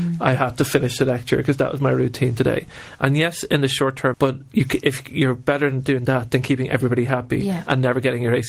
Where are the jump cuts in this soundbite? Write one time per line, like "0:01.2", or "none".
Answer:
0:04.1

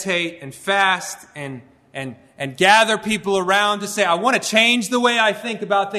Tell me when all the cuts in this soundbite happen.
none

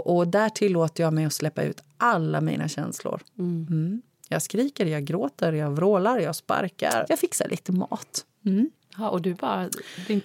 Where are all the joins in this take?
0:07.1

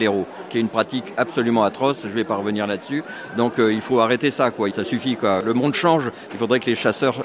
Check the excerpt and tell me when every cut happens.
0:04.7

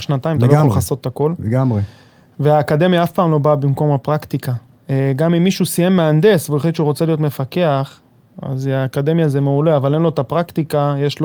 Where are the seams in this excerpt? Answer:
none

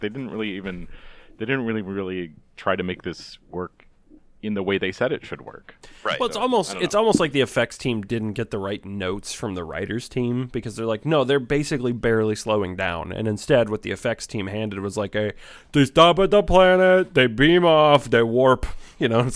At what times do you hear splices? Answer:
none

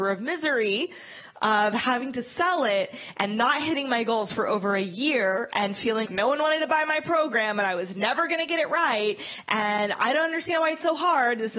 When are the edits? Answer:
0:06.0

